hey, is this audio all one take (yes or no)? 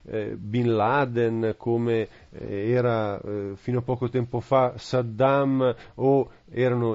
yes